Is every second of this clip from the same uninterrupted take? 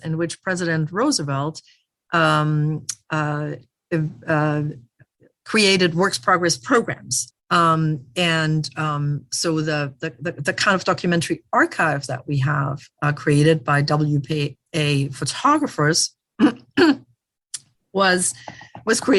no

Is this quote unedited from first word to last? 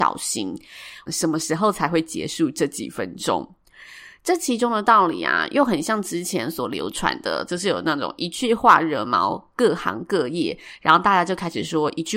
no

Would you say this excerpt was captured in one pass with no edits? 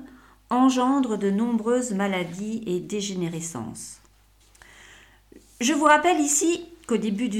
yes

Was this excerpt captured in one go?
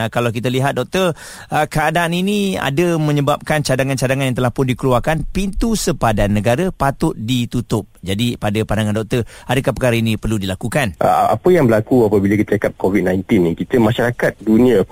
yes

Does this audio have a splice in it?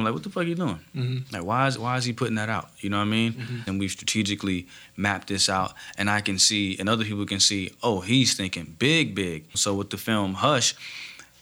yes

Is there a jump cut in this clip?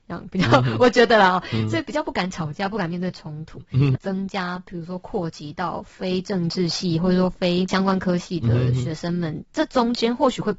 yes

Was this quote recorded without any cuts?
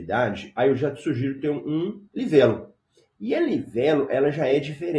yes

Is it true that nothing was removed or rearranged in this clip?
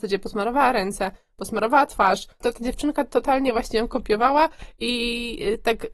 no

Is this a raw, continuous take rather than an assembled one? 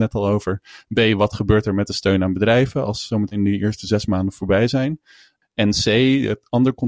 yes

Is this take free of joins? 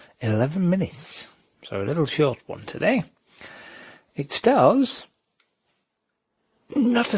yes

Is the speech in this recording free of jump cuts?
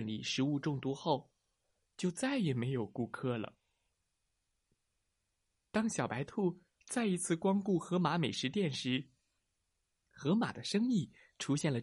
yes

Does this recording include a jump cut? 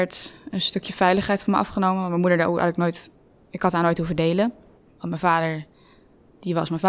no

